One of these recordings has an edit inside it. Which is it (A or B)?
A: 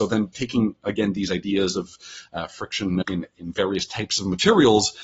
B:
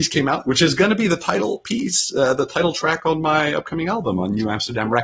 A